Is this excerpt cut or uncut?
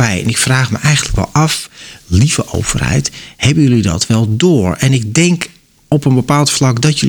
uncut